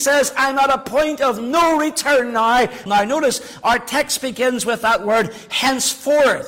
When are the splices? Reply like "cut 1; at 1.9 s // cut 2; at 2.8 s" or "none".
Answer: cut 1; at 2.9 s